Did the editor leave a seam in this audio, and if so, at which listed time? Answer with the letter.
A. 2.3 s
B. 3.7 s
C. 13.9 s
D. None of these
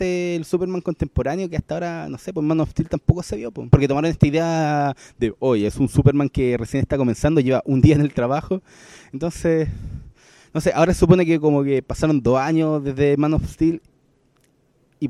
B